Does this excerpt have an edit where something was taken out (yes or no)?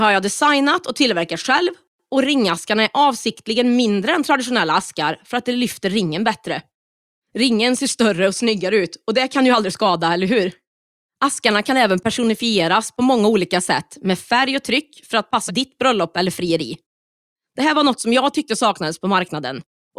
yes